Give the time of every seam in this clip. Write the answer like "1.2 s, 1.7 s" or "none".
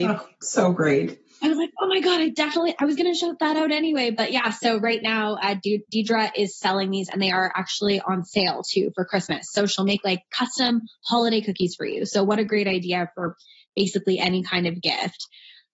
none